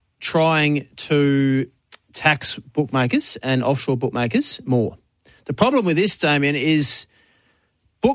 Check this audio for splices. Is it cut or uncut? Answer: uncut